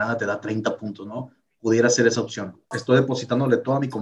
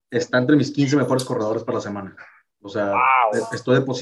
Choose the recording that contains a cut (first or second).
first